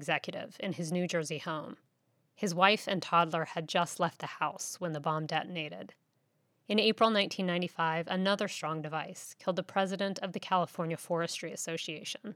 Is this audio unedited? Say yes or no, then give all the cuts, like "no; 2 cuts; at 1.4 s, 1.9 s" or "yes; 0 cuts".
yes; 0 cuts